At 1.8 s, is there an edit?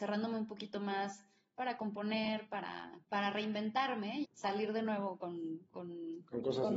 no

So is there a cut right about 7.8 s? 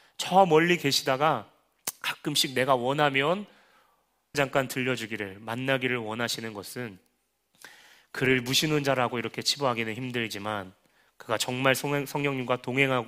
no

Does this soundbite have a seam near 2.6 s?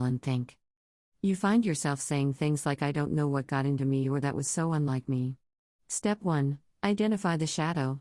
no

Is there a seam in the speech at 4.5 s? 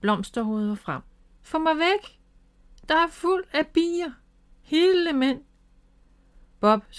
yes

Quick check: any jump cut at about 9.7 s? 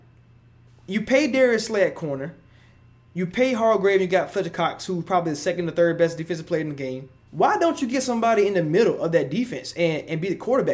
no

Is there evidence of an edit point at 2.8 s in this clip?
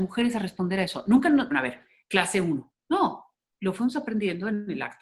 no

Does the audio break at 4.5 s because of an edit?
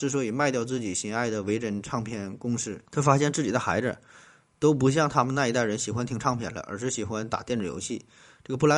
no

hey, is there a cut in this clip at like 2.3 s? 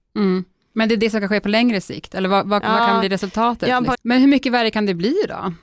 no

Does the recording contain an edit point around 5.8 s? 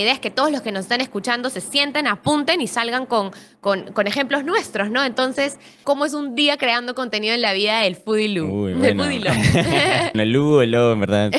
yes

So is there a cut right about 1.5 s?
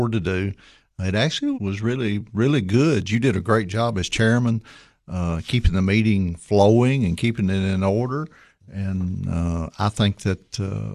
yes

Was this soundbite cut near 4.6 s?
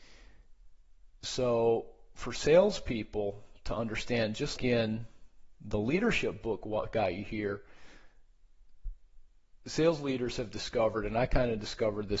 yes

